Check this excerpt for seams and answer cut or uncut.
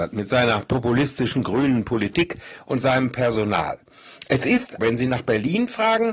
cut